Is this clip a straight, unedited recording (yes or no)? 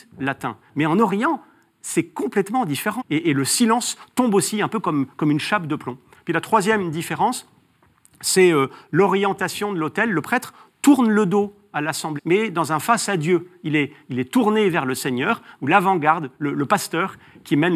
no